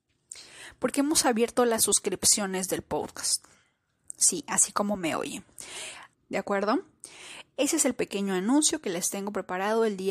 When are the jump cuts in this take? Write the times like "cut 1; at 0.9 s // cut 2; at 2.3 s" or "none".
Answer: cut 1; at 6.1 s